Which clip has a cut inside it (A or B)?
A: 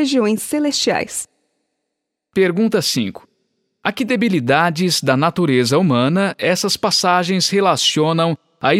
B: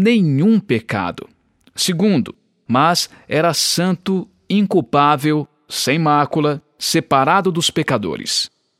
B